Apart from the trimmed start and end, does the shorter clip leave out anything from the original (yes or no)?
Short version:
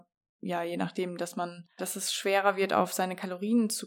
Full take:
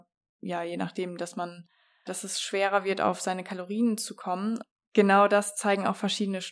yes